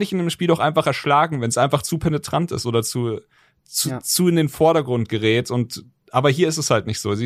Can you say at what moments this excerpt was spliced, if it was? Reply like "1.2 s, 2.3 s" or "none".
none